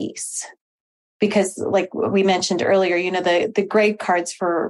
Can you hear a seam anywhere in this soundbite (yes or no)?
no